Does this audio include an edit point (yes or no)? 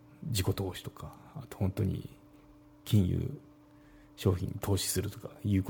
no